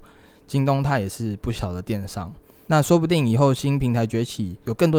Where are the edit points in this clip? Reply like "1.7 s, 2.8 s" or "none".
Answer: 2.7 s